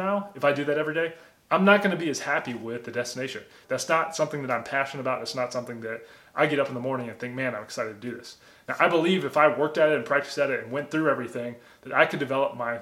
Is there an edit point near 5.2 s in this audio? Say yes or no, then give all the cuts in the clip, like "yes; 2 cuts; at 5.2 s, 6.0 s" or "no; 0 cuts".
no; 1 cut; at 3.6 s